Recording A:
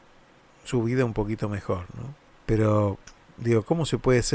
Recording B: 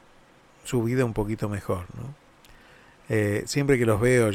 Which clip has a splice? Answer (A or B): A